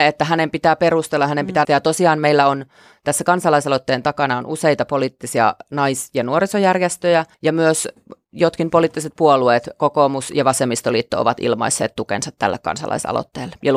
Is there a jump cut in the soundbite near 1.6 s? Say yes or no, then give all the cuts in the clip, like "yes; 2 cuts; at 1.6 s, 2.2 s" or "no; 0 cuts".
yes; 2 cuts; at 1.6 s, 7.3 s